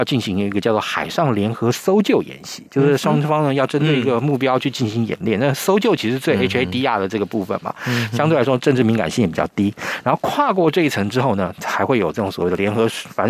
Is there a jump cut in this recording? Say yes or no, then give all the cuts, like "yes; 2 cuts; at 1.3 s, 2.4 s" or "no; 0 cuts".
no; 0 cuts